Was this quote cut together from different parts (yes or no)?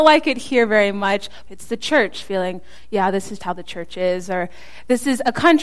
yes